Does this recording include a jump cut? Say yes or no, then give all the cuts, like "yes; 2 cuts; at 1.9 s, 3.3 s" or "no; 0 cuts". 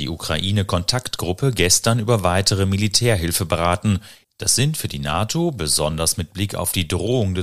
yes; 1 cut; at 4.2 s